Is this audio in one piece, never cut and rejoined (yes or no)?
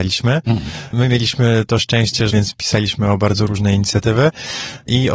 no